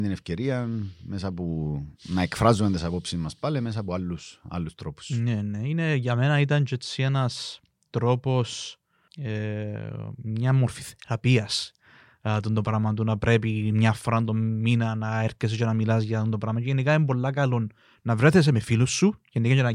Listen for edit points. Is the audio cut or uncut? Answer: cut